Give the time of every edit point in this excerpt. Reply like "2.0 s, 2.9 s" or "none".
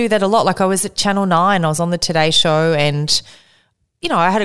none